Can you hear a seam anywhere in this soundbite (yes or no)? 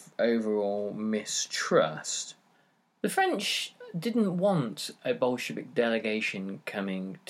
no